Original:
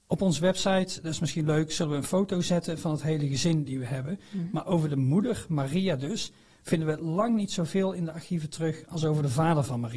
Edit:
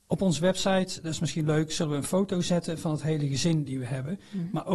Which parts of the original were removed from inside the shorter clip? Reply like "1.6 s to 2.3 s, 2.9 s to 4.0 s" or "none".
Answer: none